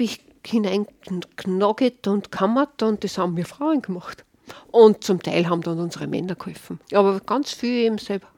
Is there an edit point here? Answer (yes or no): yes